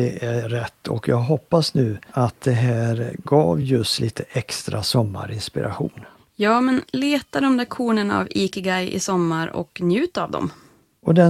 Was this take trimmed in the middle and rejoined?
no; 0 cuts

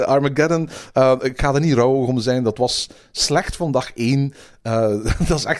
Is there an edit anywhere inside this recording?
no; 0 cuts

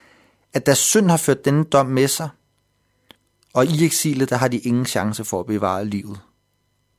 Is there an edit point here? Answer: no; 0 cuts

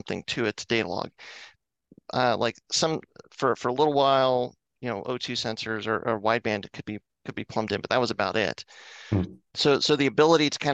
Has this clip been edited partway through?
no; 0 cuts

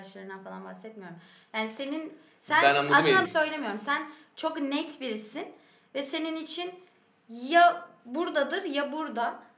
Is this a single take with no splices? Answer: no; 1 cut; at 3.2 s

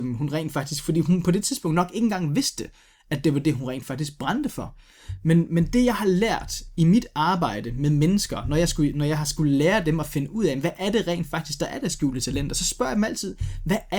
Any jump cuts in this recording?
no; 0 cuts

